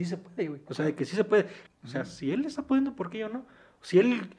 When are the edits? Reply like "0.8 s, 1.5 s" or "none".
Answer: 1.7 s